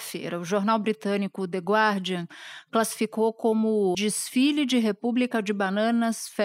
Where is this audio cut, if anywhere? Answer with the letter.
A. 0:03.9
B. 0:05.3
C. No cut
A